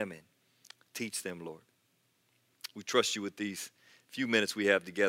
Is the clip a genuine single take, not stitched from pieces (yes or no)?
yes